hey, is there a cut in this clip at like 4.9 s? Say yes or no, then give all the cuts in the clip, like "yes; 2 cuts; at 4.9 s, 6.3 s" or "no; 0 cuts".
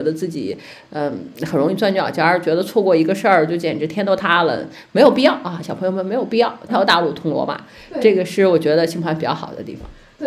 no; 1 cut; at 6.7 s